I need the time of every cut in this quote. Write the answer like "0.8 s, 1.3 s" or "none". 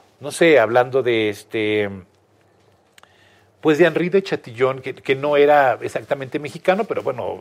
4.8 s

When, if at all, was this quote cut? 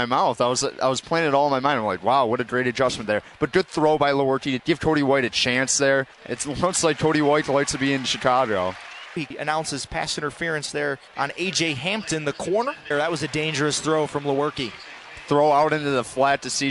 9.2 s, 11.1 s, 12.9 s

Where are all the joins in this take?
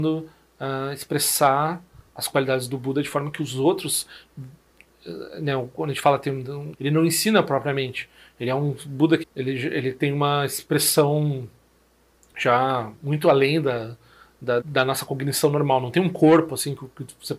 6.7 s, 9.2 s, 14.6 s

